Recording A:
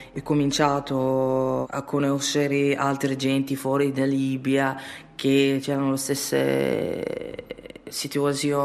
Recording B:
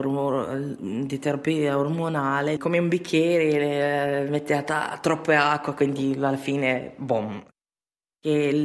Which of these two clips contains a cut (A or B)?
B